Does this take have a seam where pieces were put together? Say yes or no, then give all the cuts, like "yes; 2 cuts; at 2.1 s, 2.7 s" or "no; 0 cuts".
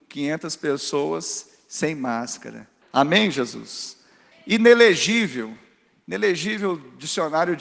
yes; 2 cuts; at 2.8 s, 4.3 s